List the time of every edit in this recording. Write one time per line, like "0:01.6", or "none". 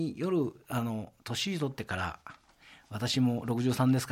none